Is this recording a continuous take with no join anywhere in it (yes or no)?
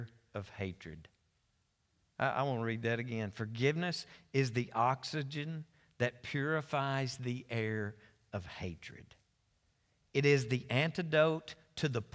yes